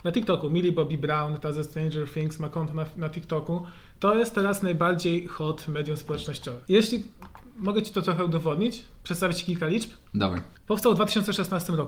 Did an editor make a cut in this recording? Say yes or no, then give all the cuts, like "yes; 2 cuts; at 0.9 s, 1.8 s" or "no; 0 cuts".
yes; 1 cut; at 6.6 s